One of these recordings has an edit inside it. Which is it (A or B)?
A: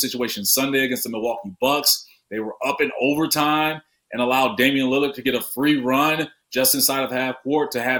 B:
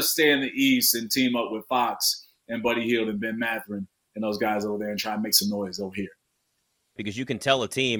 B